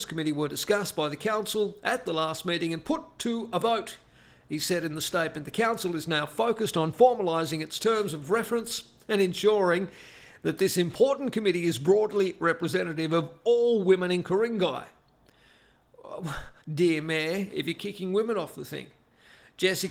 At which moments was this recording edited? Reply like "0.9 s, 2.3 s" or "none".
16.6 s